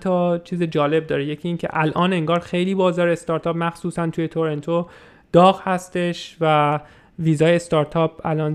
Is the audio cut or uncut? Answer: uncut